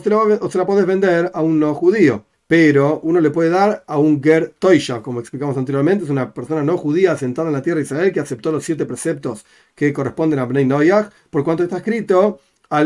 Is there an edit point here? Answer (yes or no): yes